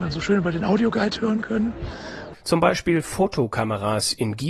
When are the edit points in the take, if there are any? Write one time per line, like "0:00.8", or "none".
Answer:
0:02.3

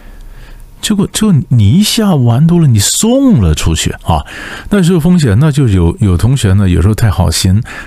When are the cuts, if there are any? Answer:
0:04.0

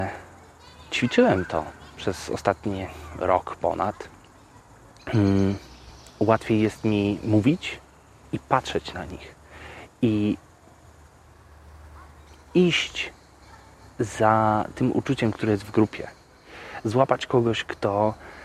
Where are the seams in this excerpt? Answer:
none

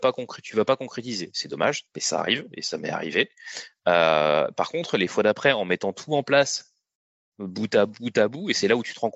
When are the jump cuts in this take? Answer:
none

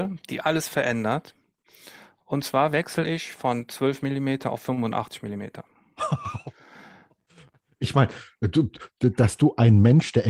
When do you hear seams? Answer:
none

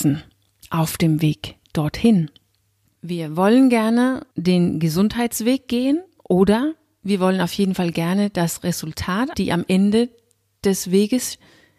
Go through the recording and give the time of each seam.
0:02.9
0:04.3
0:09.3

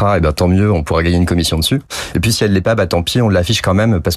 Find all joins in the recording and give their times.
none

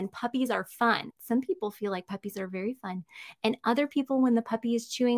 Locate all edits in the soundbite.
0:01.1

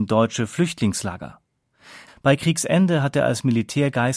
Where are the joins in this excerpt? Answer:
0:02.1

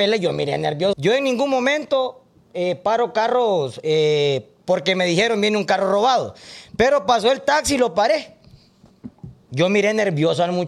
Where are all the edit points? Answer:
0:00.9

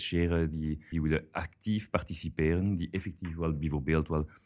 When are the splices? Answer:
0:00.9

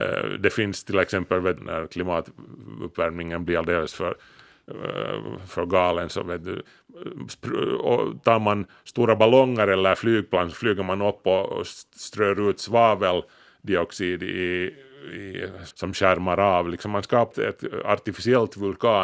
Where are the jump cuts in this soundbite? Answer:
0:01.6
0:15.7
0:17.3

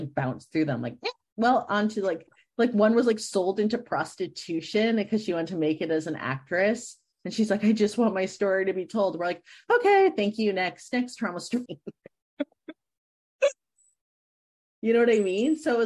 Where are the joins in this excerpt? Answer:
0:11.7

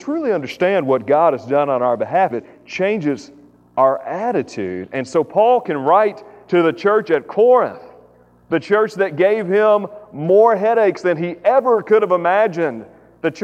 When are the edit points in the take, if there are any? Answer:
0:02.3

